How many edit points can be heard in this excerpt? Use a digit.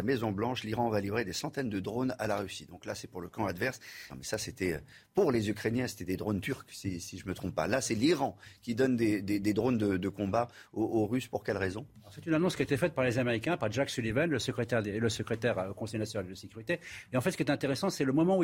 1